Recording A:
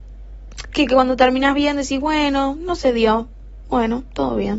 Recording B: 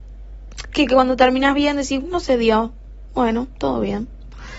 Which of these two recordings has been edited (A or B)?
B